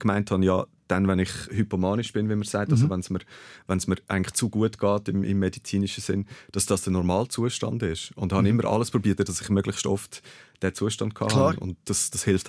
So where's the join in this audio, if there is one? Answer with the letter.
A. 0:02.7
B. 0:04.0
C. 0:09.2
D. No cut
C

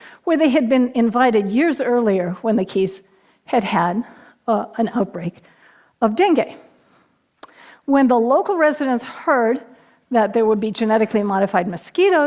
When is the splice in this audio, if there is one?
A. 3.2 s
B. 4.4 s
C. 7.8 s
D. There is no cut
C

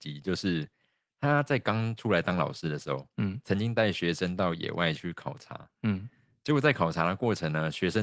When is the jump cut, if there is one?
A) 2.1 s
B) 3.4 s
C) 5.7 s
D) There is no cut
D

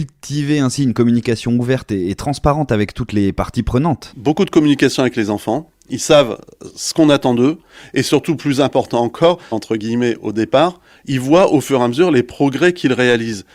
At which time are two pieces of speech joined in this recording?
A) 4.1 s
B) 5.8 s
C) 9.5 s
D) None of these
C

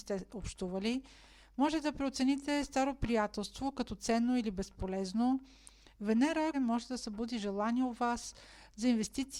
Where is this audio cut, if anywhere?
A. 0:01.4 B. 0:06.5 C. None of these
B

